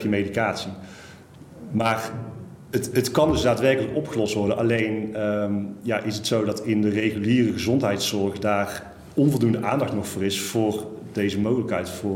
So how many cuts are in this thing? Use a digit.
0